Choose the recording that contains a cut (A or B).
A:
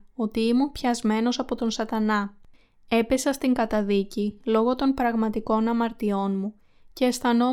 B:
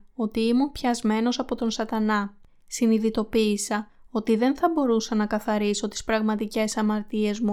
B